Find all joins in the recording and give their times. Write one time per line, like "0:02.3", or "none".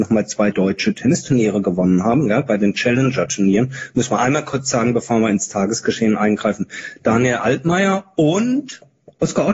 none